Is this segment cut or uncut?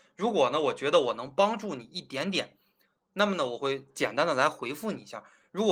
uncut